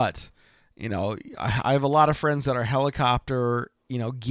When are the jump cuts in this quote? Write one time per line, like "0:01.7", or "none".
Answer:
none